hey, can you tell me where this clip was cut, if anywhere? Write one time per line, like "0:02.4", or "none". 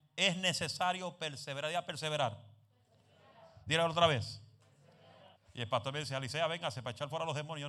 0:05.3